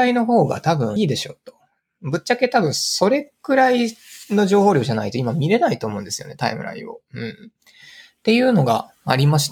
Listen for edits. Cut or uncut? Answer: cut